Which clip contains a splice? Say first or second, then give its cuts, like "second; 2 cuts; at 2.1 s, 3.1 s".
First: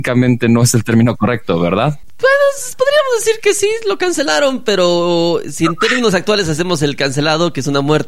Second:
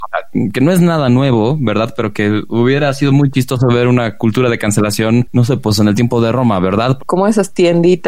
second; 1 cut; at 7.0 s